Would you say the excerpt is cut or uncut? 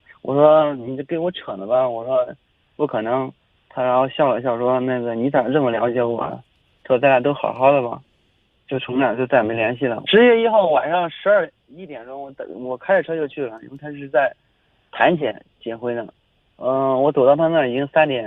cut